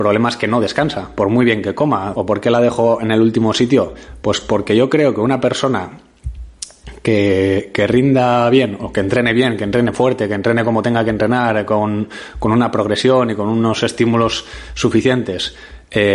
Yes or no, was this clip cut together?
yes